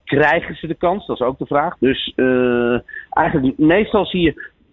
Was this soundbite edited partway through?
yes; 1 cut; at 1.7 s

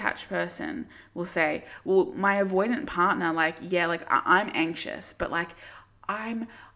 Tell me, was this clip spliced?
no; 0 cuts

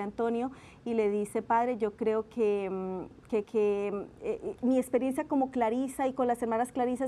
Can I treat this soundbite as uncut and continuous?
no; 2 cuts; at 3.4 s, 4.6 s

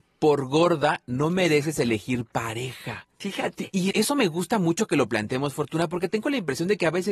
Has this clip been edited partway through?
yes; 1 cut; at 3.9 s

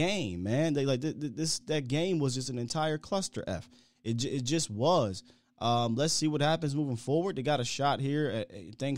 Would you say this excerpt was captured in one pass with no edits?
yes; 0 cuts

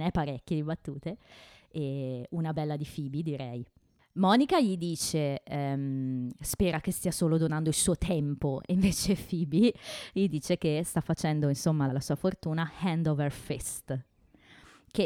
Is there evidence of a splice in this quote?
yes; 1 cut; at 11.9 s

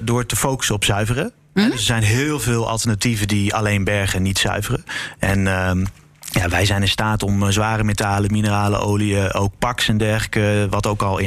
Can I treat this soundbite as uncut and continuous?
yes; 0 cuts

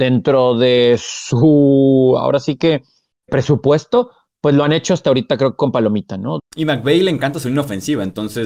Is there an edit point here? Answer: yes; 2 cuts; at 3.3 s, 6.4 s

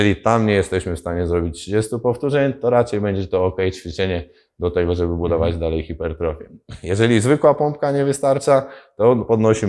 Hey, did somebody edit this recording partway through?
no; 0 cuts

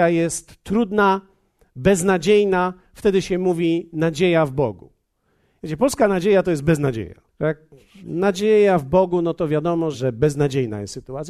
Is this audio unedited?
no; 3 cuts; at 5.6 s, 7.3 s, 9.9 s

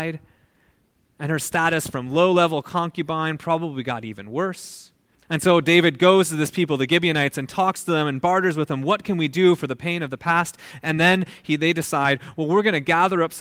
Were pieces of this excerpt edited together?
yes; 1 cut; at 5.2 s

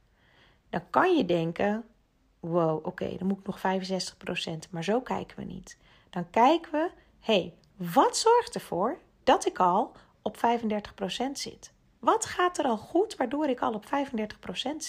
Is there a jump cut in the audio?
no; 0 cuts

